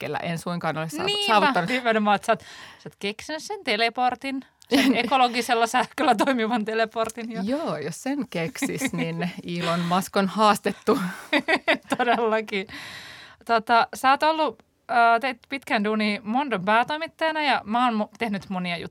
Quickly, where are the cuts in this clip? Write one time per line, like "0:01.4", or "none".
0:01.7